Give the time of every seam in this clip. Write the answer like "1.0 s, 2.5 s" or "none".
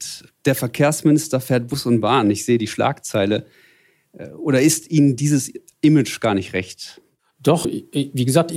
7.6 s

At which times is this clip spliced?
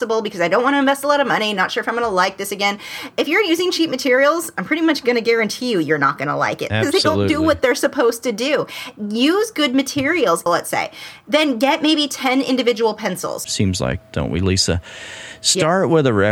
10.5 s, 13.4 s

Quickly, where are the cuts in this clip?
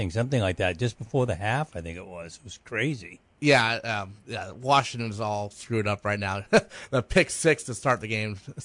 none

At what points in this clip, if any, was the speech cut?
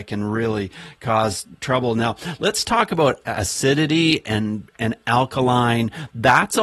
none

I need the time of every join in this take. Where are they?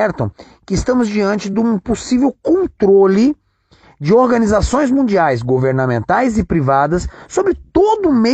none

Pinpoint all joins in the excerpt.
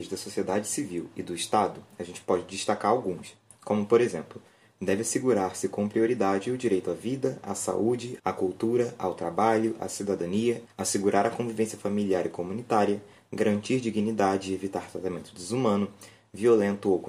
8.2 s, 10.7 s

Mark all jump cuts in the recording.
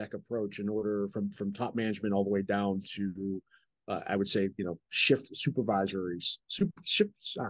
none

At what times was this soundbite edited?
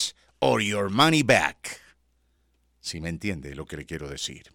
none

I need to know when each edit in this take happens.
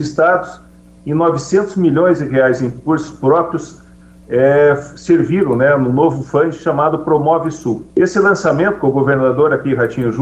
7.9 s

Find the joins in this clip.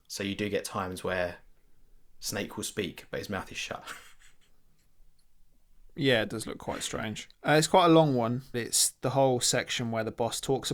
7.3 s

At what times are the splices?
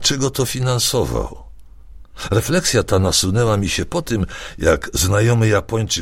none

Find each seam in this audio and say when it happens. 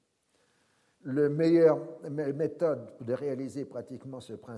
0.9 s

